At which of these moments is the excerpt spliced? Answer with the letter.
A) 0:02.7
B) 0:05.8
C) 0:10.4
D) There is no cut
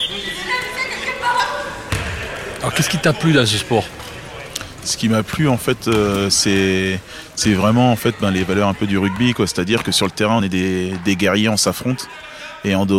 D